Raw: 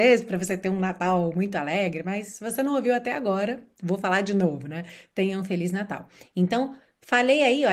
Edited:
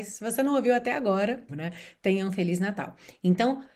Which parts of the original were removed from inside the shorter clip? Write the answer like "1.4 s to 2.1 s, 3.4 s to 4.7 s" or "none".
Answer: 3.7 s to 4.6 s